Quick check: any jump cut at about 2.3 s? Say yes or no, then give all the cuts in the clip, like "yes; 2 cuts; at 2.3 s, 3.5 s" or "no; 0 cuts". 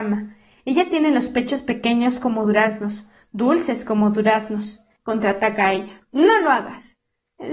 no; 1 cut; at 5.0 s